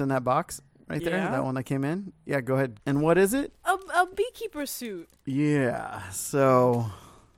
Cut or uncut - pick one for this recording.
cut